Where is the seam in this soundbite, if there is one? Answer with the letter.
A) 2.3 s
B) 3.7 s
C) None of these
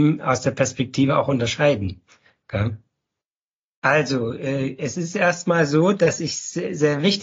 B